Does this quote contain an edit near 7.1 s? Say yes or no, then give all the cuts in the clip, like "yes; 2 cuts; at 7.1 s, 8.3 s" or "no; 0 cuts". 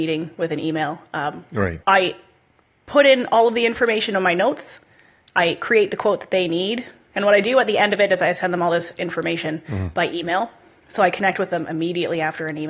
yes; 2 cuts; at 1.8 s, 7.1 s